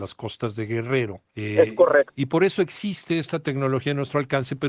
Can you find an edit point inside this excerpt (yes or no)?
yes